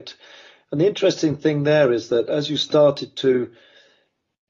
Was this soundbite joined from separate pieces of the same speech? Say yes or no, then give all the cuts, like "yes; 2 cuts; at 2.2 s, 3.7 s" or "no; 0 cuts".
no; 0 cuts